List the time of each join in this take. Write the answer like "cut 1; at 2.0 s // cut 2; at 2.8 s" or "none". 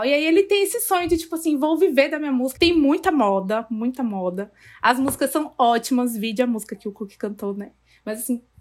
cut 1; at 2.5 s